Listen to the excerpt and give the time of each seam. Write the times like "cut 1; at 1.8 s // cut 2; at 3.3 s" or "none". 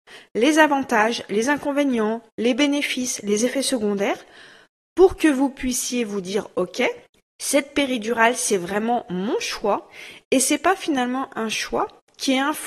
none